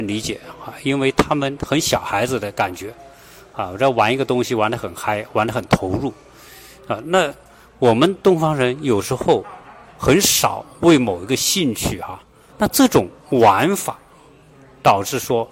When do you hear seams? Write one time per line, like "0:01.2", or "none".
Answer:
0:12.5